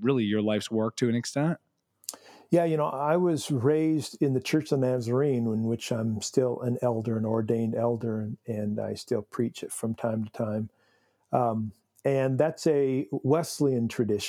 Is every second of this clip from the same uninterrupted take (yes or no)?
yes